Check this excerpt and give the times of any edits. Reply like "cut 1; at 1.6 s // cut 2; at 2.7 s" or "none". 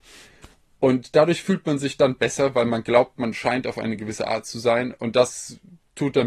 none

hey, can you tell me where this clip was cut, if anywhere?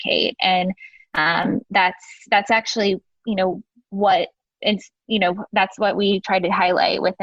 cut 1; at 1.6 s

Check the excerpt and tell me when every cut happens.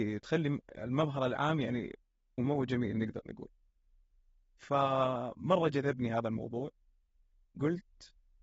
cut 1; at 2.4 s

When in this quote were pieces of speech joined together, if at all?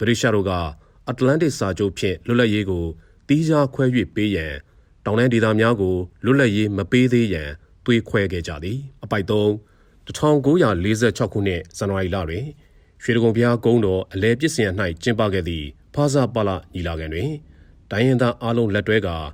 cut 1; at 9.0 s

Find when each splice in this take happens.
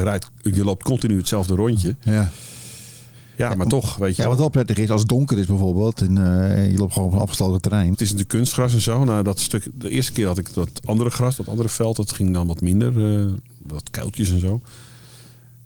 cut 1; at 7.9 s

